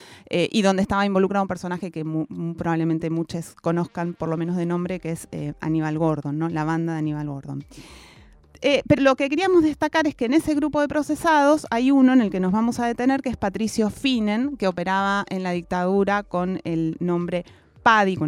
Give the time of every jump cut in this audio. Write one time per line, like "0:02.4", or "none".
0:09.0